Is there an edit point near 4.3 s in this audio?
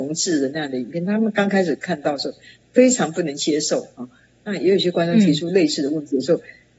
yes; 1 cut; at 4.3 s

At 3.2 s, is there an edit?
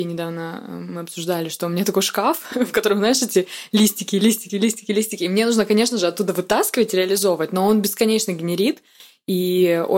no; 1 cut; at 4.5 s

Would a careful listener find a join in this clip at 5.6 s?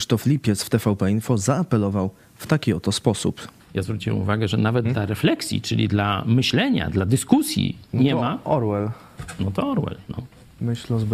no; 1 cut; at 3.6 s

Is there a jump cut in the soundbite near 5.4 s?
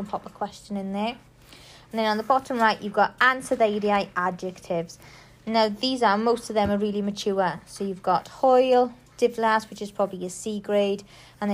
no; 0 cuts

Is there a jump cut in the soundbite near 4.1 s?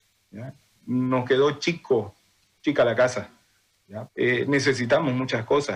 yes; 1 cut; at 4.1 s

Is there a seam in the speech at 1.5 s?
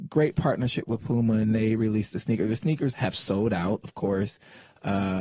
no; 1 cut; at 2.9 s

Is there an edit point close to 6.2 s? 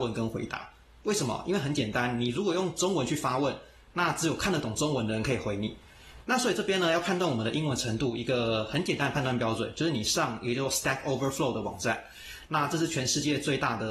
yes; 1 cut; at 6.2 s

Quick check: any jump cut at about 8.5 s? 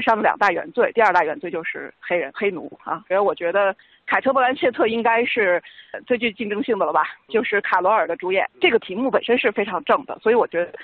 yes; 3 cuts; at 0.9 s, 3.1 s, 8.5 s

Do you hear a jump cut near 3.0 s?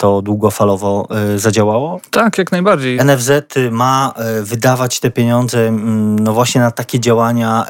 yes; 1 cut; at 3.0 s

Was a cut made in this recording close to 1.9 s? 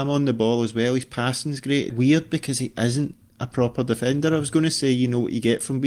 yes; 1 cut; at 1.9 s

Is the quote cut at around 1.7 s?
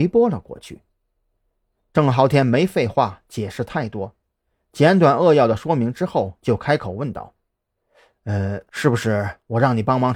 yes; 1 cut; at 1.7 s

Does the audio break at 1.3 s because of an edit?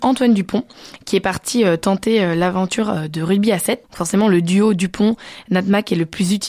no; 1 cut; at 3.8 s

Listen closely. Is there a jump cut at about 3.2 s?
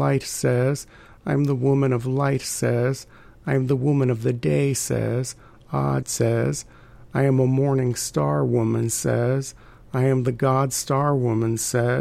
no; 1 cut; at 6.0 s

